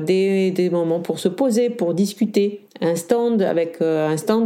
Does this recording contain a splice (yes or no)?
no